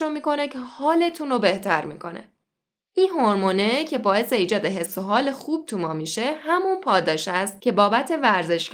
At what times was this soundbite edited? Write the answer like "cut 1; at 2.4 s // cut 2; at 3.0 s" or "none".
none